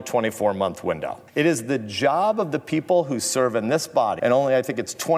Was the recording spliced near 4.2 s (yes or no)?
yes